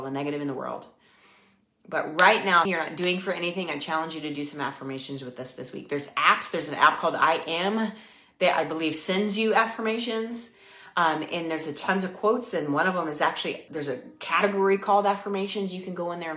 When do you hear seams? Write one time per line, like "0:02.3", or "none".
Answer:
0:02.6
0:10.9
0:13.7